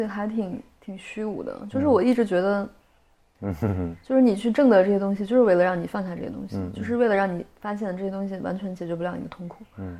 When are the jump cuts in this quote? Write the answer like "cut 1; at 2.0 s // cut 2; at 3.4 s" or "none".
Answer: cut 1; at 3.3 s